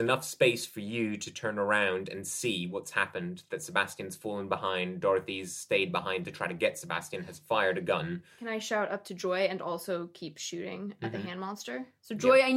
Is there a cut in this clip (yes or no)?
no